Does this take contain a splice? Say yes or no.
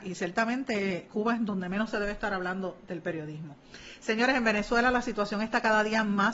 no